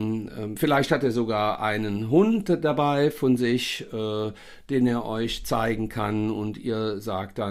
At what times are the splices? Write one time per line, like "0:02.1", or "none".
none